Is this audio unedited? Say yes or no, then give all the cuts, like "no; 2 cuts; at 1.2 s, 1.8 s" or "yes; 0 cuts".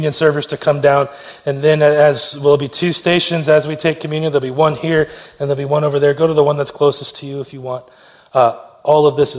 yes; 0 cuts